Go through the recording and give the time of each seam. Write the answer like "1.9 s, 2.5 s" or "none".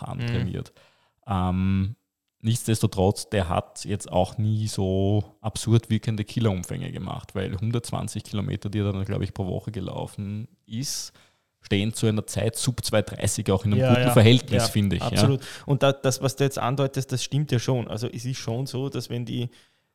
none